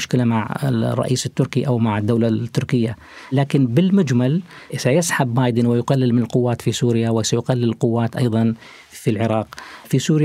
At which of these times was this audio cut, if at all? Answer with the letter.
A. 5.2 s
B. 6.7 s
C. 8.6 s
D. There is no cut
D